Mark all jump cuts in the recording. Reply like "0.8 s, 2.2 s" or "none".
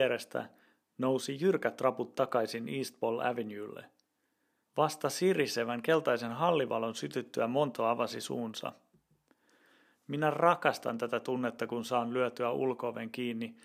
4.6 s